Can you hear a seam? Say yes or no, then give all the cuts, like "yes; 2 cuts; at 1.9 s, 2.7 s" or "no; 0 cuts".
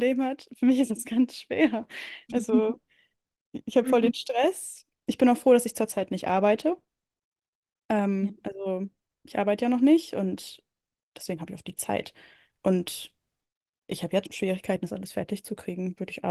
yes; 1 cut; at 14.2 s